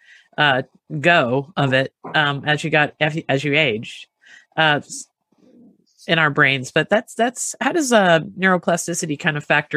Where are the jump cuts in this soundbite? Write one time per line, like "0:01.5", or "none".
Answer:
none